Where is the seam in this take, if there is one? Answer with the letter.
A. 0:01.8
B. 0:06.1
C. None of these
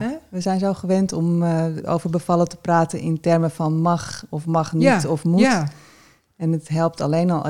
A